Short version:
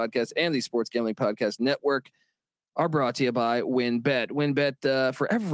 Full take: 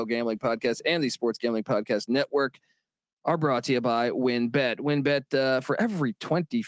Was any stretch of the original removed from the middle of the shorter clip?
no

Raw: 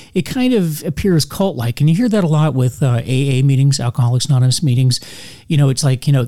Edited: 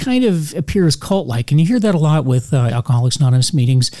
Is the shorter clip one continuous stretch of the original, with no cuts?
no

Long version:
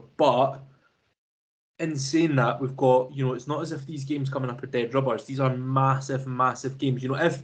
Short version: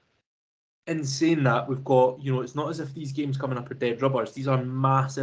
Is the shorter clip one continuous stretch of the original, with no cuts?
yes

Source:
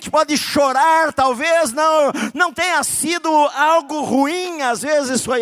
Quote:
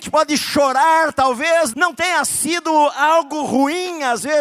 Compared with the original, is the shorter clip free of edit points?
no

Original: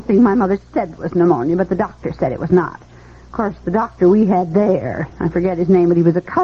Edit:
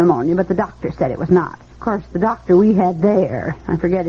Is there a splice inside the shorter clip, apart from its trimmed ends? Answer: yes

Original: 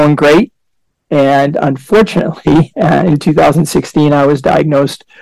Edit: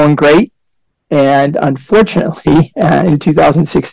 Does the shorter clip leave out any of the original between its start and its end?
no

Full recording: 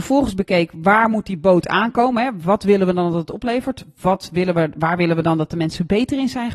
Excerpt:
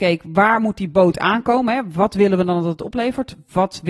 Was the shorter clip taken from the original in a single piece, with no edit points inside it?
yes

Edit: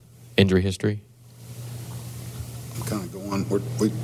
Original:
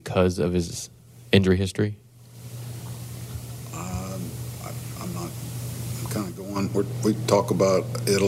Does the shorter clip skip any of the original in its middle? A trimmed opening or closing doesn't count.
yes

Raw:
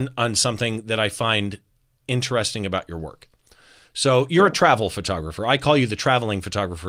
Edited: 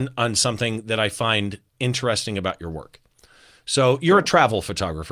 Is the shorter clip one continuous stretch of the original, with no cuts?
no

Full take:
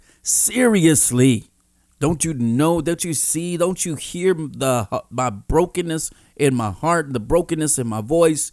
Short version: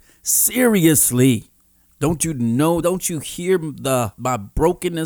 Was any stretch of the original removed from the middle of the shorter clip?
yes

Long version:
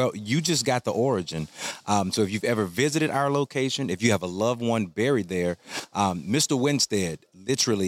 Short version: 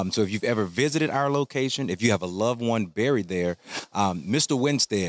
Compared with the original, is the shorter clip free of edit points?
yes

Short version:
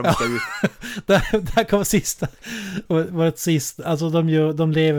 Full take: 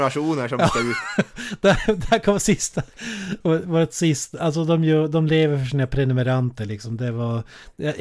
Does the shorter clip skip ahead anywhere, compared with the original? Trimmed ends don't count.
no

